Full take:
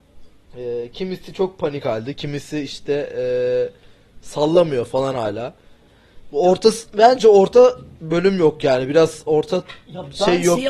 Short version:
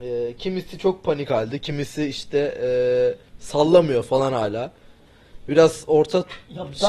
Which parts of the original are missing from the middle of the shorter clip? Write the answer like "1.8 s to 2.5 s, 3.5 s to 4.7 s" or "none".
3.8 s to 4.1 s, 6.3 s to 8.9 s